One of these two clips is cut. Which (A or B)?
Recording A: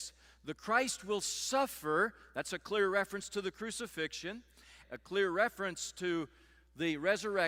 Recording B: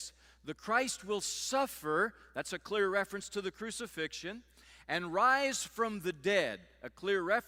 A